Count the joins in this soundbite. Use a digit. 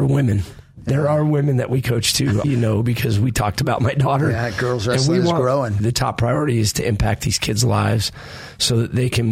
2